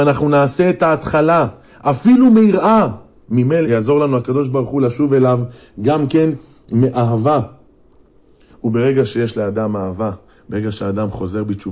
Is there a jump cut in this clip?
yes; 1 cut; at 3.6 s

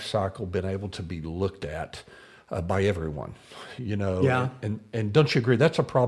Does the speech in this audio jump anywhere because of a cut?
no; 0 cuts

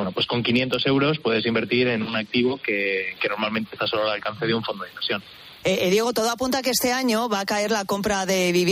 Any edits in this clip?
yes; 1 cut; at 5.6 s

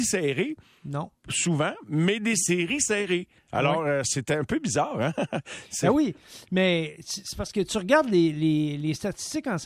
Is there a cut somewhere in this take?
no; 0 cuts

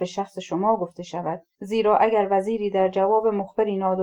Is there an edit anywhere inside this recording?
yes; 1 cut; at 1.5 s

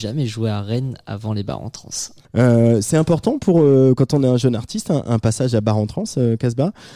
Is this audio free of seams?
no; 1 cut; at 2.2 s

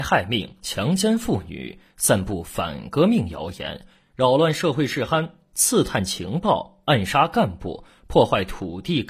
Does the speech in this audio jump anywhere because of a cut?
no; 0 cuts

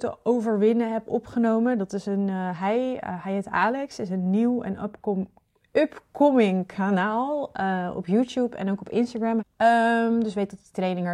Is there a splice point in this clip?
yes; 1 cut; at 9.4 s

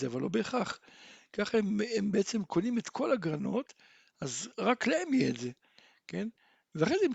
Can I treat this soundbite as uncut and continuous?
yes; 0 cuts

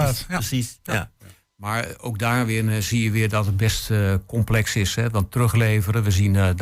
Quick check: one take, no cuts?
yes; 0 cuts

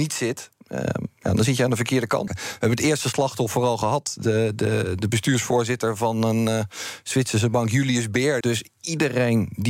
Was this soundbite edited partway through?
yes; 2 cuts; at 2.3 s, 8.4 s

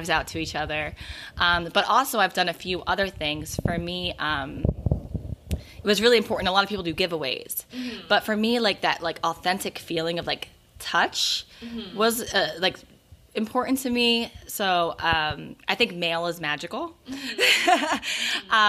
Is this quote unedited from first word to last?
yes; 0 cuts

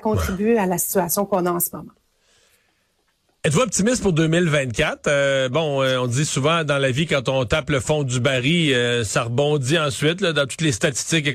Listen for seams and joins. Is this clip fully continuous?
yes; 0 cuts

